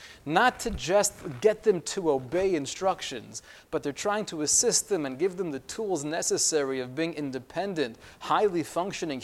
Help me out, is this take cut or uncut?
uncut